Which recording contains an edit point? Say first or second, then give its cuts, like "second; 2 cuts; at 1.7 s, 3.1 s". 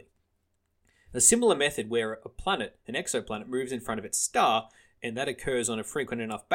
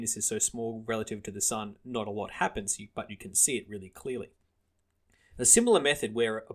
first; 1 cut; at 5.0 s